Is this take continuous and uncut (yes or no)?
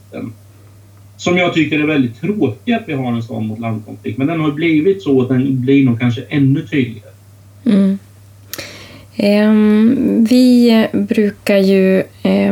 yes